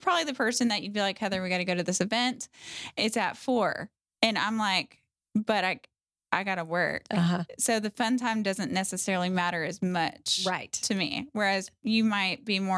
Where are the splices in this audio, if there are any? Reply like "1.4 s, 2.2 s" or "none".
none